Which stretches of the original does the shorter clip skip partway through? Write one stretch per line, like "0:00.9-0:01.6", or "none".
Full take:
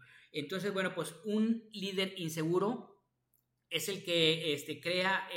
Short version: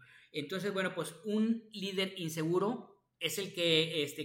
0:03.1-0:03.6